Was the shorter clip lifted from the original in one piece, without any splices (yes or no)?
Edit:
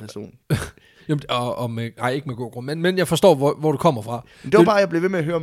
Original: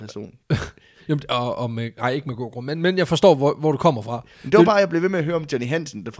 yes